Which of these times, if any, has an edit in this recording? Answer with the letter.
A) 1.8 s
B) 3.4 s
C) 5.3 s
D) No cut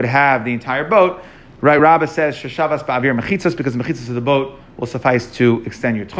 D